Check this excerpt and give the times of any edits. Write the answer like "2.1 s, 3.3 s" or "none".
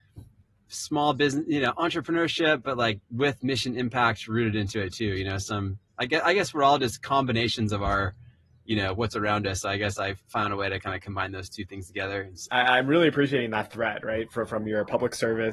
12.5 s